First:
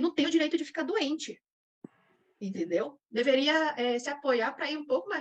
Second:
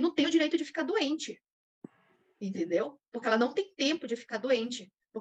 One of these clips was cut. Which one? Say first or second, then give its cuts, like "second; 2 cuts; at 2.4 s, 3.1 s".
first; 1 cut; at 3.1 s